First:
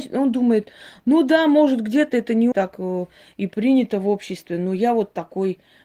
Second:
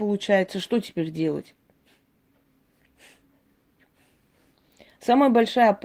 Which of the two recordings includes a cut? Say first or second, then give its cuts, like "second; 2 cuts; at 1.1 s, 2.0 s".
first; 1 cut; at 2.5 s